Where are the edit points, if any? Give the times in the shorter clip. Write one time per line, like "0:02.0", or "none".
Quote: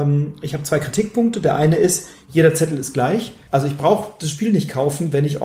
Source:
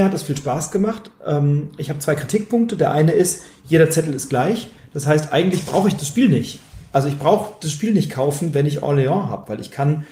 0:03.4